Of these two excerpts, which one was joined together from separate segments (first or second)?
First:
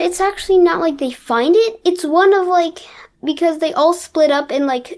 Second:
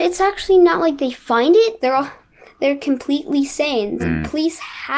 second